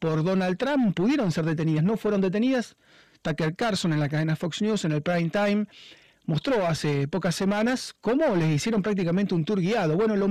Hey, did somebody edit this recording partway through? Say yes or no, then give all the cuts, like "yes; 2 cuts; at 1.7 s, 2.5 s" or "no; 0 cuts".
no; 0 cuts